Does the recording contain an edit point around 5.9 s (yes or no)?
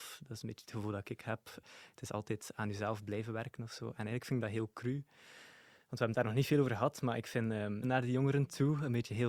no